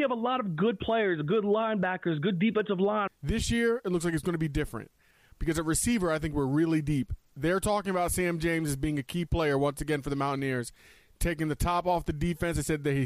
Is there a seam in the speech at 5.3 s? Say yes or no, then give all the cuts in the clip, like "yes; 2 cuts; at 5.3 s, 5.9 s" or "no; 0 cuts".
yes; 2 cuts; at 3.1 s, 5.3 s